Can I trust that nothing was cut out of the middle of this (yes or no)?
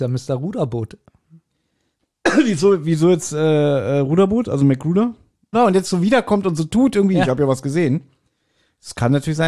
no